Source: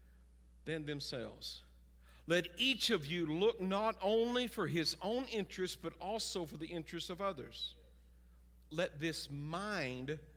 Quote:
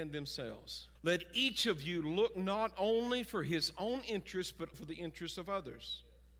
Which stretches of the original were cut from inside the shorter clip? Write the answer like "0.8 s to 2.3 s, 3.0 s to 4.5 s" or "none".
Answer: 1.7 s to 2.2 s, 6.0 s to 6.5 s